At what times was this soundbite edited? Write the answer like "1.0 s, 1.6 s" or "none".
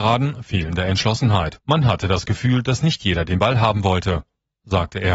1.6 s